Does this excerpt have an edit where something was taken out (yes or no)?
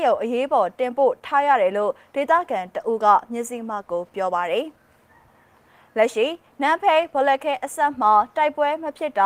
no